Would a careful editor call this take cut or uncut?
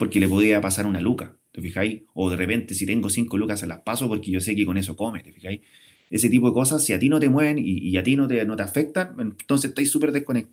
uncut